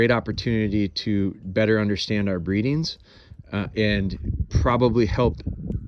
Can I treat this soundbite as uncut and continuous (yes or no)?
yes